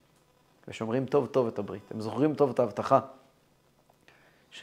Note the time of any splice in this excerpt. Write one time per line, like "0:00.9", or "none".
0:02.4